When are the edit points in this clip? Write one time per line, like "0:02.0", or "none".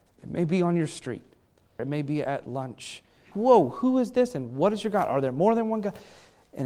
0:01.8
0:03.3